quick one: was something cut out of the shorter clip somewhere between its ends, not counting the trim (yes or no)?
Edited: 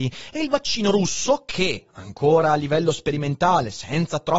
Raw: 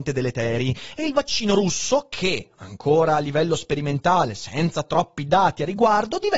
no